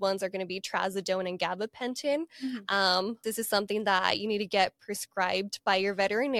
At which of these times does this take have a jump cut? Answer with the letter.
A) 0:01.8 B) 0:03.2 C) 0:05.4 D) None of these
B